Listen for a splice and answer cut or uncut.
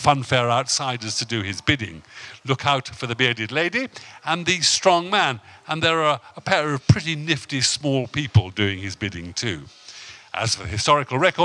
uncut